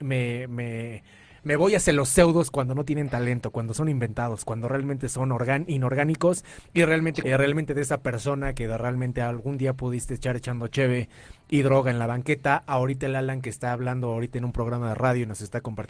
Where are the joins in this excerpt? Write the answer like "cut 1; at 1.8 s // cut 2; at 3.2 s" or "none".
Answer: cut 1; at 7.2 s